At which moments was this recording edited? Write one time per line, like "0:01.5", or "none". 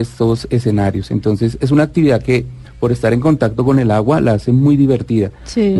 none